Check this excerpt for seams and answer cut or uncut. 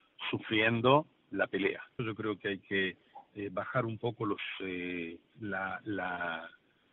cut